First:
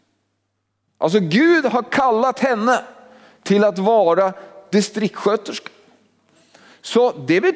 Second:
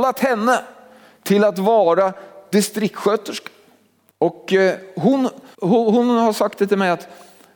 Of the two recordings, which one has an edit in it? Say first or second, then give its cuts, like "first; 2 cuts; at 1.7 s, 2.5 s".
second; 2 cuts; at 4.1 s, 5.5 s